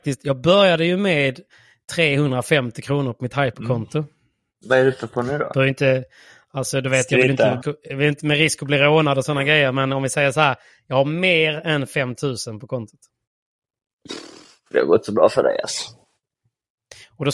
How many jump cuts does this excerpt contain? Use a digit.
1